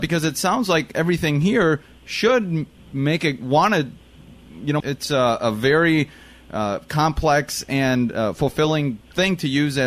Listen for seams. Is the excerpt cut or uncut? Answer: cut